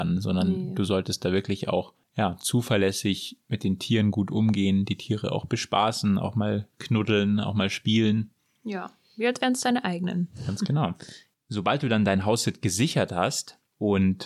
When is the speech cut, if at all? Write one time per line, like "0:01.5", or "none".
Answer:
none